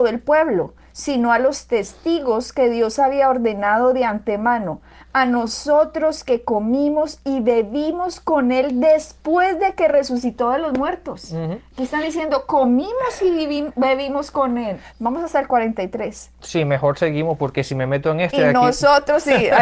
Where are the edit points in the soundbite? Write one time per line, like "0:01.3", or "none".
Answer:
0:14.9